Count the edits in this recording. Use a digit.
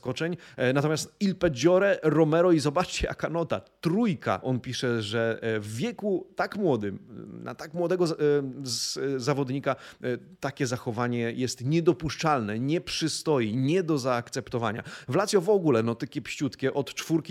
1